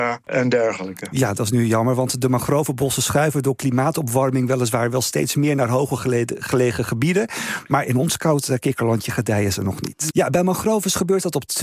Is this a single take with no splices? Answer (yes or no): no